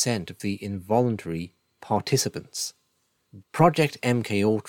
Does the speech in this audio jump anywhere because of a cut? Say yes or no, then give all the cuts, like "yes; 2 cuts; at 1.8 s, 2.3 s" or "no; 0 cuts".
yes; 1 cut; at 3.4 s